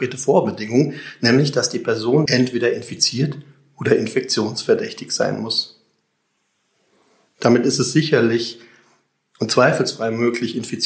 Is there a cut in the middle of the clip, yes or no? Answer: yes